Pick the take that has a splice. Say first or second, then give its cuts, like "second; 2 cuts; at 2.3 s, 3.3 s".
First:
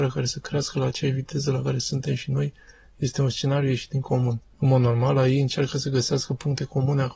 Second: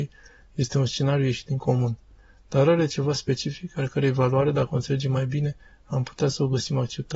first; 1 cut; at 4.5 s